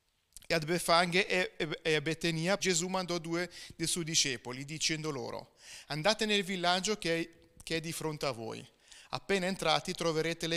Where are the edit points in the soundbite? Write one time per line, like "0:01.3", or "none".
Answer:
0:02.6